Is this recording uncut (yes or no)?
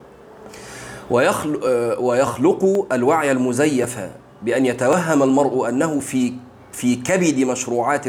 yes